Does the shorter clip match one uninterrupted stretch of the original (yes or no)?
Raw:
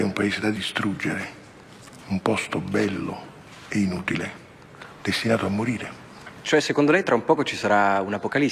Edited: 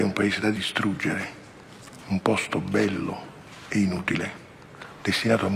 yes